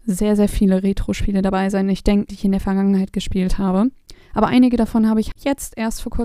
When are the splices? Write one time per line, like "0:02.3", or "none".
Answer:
0:02.3
0:04.2
0:05.3